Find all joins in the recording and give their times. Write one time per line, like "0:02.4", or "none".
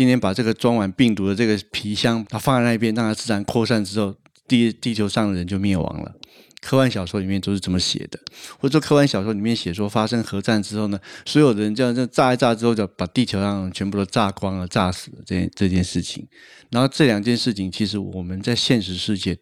0:02.2

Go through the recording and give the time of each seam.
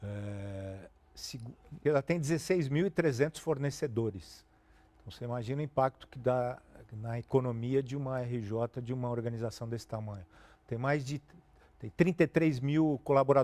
0:01.9

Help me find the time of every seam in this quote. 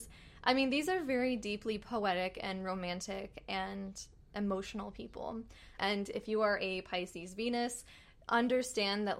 0:05.8

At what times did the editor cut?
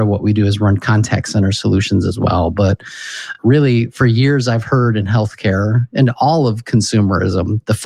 none

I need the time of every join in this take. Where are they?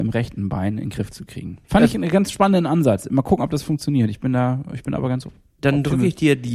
0:01.6

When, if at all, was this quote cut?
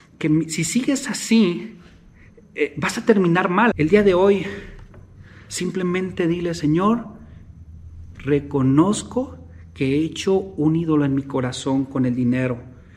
0:03.7
0:08.1

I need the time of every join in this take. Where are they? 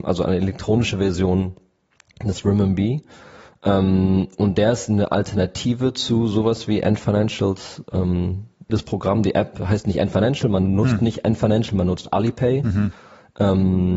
0:08.7

